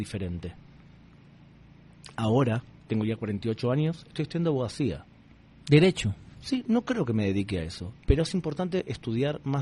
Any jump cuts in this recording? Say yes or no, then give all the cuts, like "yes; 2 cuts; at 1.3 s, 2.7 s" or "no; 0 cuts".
no; 0 cuts